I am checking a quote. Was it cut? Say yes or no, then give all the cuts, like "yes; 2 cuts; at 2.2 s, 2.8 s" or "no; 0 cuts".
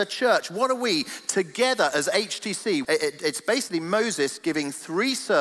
yes; 1 cut; at 2.8 s